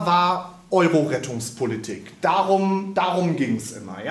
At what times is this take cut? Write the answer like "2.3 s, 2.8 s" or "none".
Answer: none